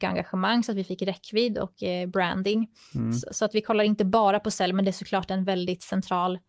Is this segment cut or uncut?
uncut